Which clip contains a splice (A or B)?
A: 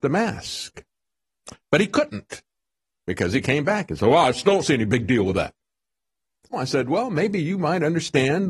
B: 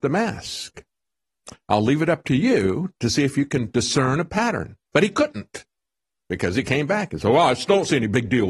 A